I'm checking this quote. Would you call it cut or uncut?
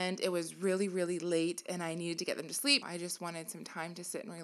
cut